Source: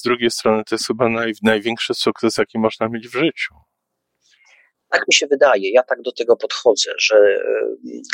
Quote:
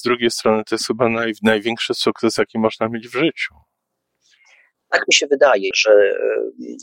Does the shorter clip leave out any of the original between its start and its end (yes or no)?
yes